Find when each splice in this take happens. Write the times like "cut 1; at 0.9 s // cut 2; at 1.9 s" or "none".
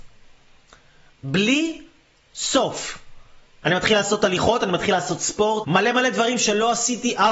cut 1; at 3.6 s // cut 2; at 5.6 s